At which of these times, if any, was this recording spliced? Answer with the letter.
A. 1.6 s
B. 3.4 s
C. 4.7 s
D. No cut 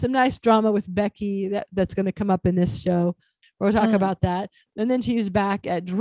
B